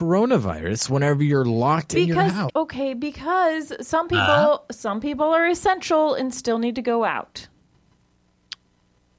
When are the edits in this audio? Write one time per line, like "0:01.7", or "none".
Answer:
0:02.5